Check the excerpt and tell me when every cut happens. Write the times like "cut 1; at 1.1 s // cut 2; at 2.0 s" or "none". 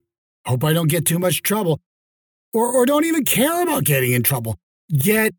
none